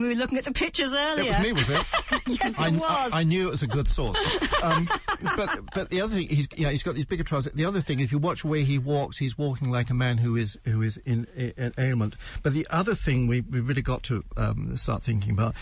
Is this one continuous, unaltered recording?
yes; 0 cuts

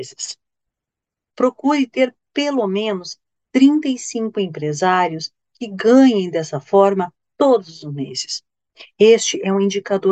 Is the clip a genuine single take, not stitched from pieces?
no; 1 cut; at 1.3 s

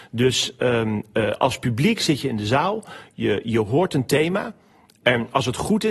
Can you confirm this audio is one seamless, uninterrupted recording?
yes; 0 cuts

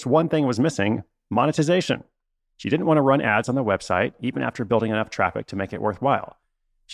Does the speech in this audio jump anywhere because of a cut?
yes; 1 cut; at 2.4 s

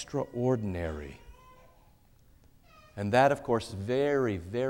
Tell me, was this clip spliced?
no; 0 cuts

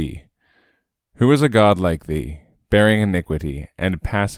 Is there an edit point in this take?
no; 0 cuts

